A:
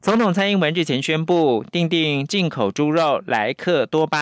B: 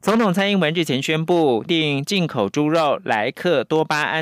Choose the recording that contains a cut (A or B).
B